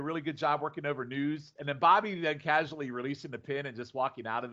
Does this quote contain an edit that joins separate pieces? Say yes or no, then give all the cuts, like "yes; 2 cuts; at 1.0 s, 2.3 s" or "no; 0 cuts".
yes; 1 cut; at 1.6 s